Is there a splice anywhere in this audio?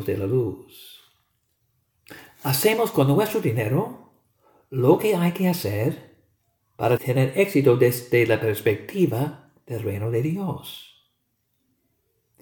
yes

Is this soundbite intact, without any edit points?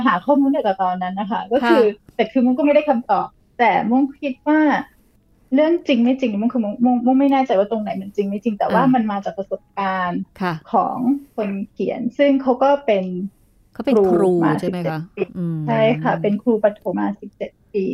no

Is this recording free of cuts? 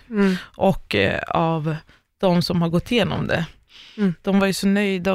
yes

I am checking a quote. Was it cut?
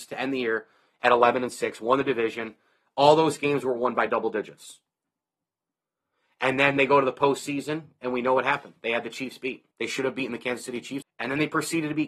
yes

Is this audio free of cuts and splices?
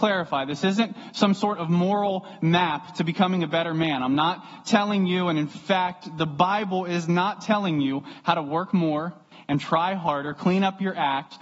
yes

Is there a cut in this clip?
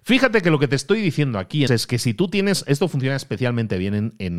yes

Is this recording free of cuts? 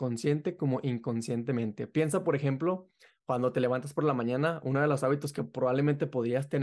yes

